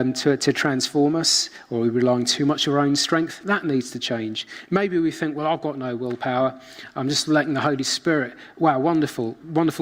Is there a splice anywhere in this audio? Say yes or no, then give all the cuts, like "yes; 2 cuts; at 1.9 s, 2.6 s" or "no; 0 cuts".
no; 0 cuts